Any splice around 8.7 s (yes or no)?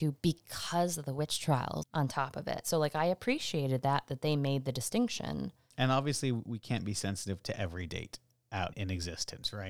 yes